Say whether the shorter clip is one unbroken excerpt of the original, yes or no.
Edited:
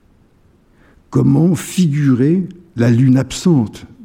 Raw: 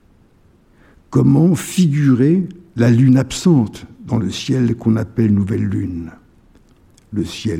yes